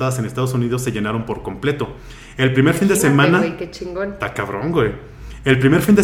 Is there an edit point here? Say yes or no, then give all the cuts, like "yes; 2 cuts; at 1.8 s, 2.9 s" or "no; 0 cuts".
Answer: no; 0 cuts